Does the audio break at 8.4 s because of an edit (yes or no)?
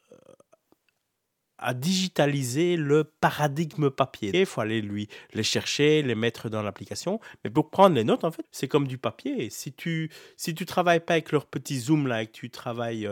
yes